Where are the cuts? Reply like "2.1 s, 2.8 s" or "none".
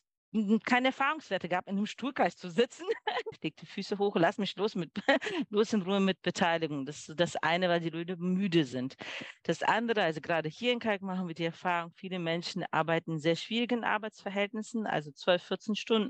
3.3 s, 9.4 s